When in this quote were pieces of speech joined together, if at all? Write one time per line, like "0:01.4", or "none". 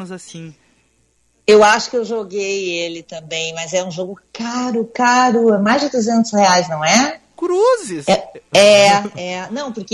none